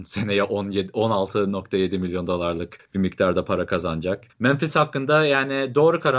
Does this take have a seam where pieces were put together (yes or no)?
yes